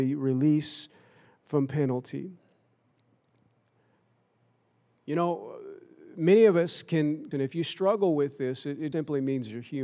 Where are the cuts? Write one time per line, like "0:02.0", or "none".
0:07.3
0:08.9